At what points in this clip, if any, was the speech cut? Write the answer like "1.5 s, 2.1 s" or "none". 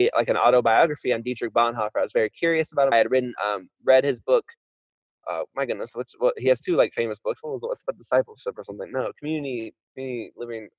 2.9 s